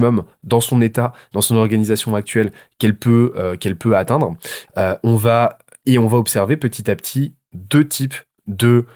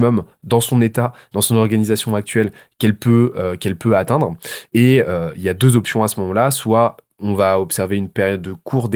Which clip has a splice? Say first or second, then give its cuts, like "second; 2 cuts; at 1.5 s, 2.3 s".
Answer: first; 1 cut; at 4.7 s